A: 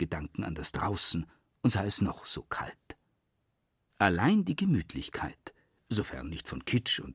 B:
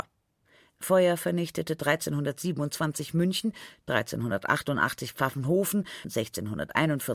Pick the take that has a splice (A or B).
B